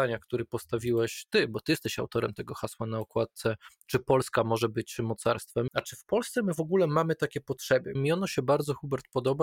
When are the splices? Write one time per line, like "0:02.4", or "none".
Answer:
0:05.7
0:08.0